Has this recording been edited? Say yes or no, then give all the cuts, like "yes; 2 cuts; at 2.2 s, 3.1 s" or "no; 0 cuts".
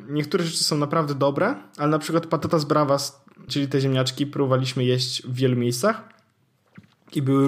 yes; 1 cut; at 3.5 s